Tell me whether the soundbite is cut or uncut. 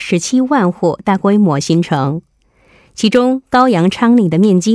uncut